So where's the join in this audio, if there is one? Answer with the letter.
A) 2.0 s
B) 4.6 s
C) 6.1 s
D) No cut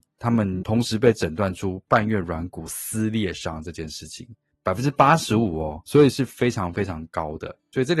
C